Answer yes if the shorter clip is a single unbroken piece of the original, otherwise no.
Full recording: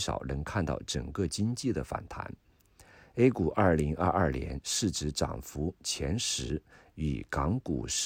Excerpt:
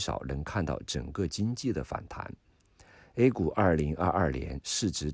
yes